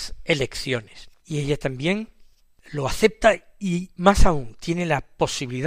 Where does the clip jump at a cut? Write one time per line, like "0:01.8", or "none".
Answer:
0:01.2